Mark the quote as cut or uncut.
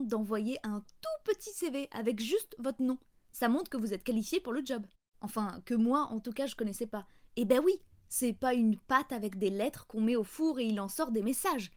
cut